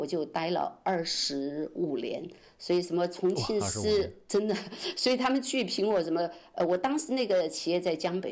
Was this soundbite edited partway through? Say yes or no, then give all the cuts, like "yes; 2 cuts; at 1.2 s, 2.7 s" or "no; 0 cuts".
no; 0 cuts